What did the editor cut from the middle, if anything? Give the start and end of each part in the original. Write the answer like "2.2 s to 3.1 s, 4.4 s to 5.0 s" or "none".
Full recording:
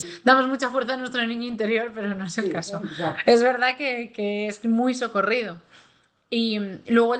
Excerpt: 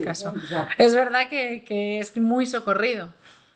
none